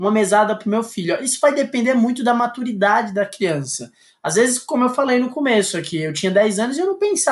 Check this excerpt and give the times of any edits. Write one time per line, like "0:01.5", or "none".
none